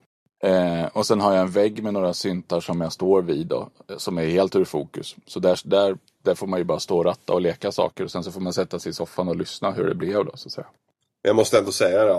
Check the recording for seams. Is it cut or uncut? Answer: uncut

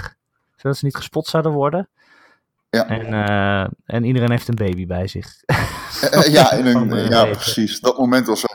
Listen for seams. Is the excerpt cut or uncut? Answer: uncut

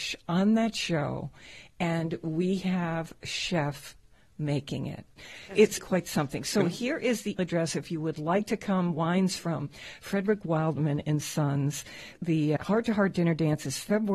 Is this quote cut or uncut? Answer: cut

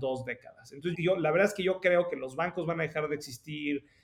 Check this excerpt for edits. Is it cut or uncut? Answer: cut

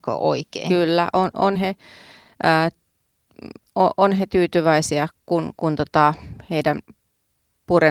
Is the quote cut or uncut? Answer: uncut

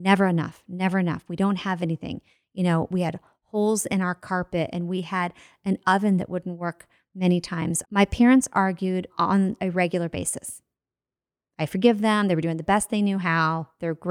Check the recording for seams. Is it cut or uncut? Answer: cut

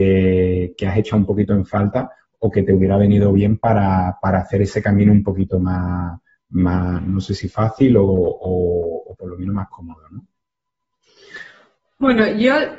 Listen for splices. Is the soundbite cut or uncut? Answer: uncut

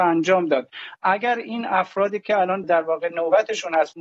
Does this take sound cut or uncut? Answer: cut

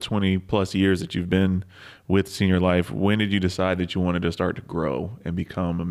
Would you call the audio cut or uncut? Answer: uncut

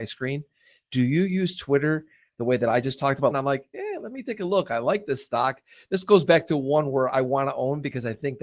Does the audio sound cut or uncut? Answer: cut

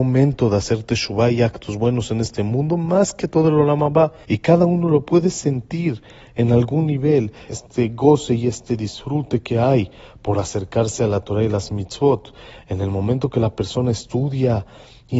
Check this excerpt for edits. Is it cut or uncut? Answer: cut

